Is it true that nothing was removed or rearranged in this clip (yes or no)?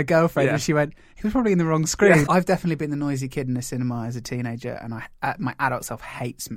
no